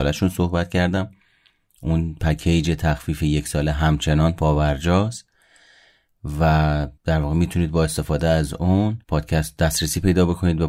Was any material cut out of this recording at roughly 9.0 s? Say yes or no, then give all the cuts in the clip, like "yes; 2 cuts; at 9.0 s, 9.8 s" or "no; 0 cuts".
yes; 2 cuts; at 7.0 s, 9.0 s